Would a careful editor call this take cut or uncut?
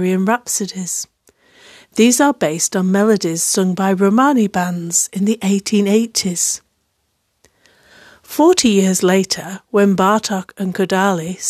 uncut